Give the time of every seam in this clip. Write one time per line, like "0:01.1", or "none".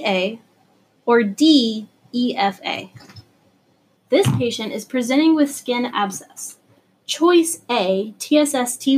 0:04.0
0:07.0